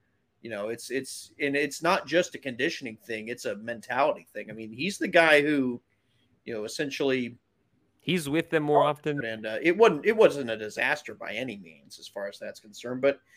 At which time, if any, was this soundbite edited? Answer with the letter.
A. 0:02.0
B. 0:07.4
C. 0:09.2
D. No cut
C